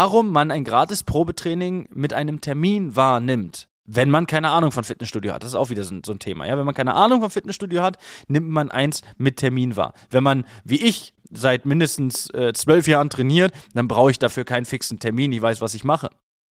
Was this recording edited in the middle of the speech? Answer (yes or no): no